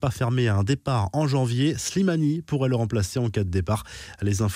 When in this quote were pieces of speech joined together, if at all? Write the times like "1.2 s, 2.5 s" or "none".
none